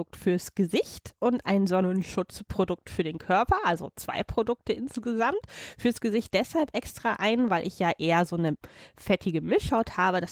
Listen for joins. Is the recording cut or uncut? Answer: uncut